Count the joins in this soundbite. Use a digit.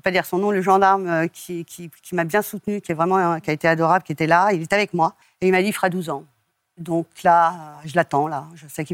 0